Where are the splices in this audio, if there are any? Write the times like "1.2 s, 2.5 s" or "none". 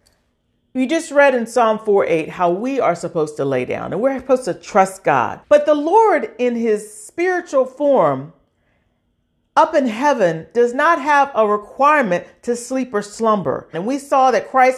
5.4 s, 13.7 s